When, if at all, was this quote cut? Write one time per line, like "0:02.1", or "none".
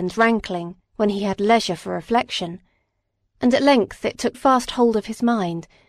0:04.3